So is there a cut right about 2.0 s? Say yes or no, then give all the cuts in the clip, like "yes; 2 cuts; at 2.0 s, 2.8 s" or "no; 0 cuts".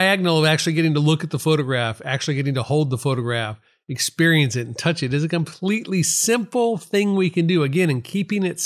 no; 0 cuts